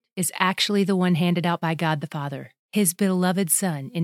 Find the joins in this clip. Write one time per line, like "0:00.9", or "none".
0:02.6